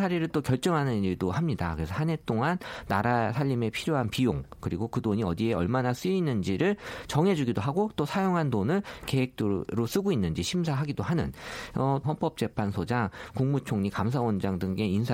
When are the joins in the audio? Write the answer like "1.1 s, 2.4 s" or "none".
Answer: 12.0 s

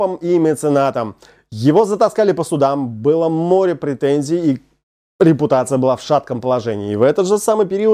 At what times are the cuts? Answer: none

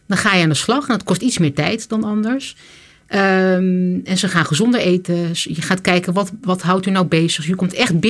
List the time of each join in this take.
none

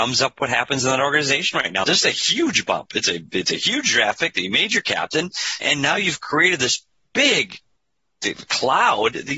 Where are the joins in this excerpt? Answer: 1.8 s, 5.6 s

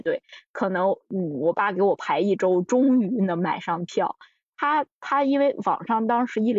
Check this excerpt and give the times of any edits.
none

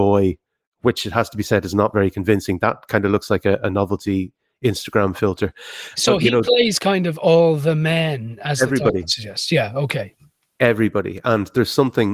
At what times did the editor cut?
none

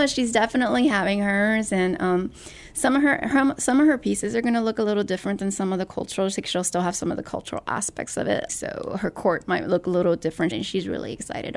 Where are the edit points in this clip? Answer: 8.5 s, 10.5 s

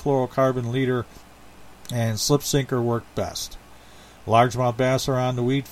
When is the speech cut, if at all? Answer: none

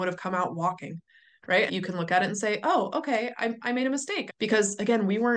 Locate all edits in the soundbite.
1.7 s, 4.3 s

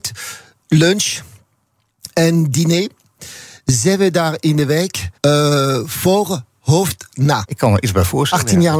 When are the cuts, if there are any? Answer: 5.1 s, 7.4 s

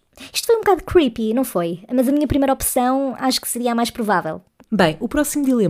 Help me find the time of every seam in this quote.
4.6 s

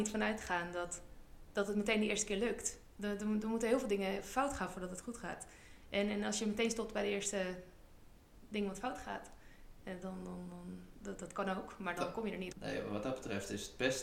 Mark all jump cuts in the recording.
12.5 s

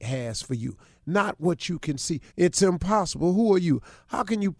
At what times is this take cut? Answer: 2.3 s

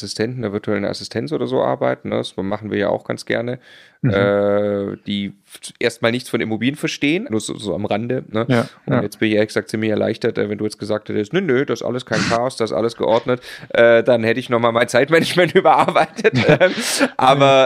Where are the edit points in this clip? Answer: 7.3 s

